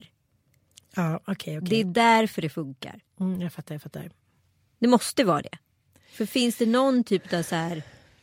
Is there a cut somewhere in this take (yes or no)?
no